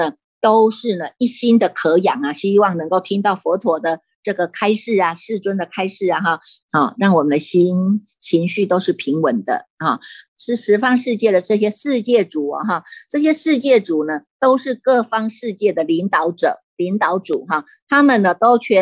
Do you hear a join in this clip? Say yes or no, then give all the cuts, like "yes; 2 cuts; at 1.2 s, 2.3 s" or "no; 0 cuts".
yes; 2 cuts; at 6.6 s, 10.3 s